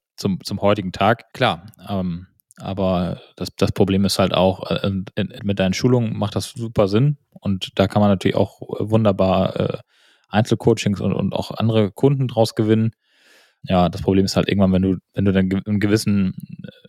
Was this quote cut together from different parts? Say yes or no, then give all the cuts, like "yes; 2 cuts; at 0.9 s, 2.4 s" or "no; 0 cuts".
yes; 1 cut; at 5.4 s